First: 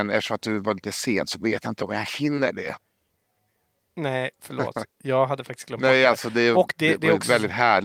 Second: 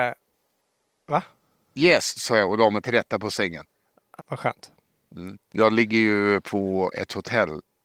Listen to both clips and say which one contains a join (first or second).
second